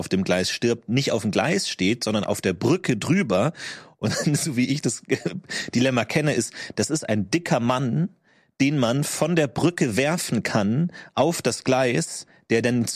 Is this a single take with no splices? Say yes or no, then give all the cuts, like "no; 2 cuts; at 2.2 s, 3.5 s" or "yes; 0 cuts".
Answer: yes; 0 cuts